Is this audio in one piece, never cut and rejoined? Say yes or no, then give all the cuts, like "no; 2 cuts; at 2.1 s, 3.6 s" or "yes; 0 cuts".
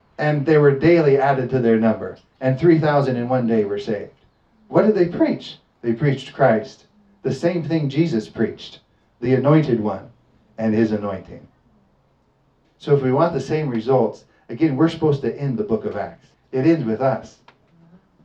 no; 2 cuts; at 12.6 s, 16.3 s